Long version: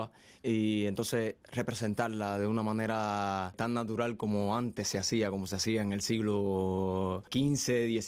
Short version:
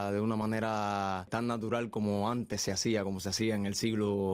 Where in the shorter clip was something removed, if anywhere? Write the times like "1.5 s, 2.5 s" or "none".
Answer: none